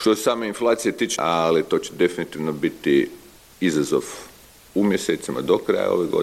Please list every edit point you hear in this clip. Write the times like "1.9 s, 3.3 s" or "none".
1.2 s